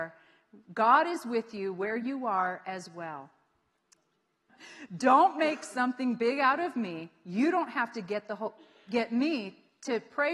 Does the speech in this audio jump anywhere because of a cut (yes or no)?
yes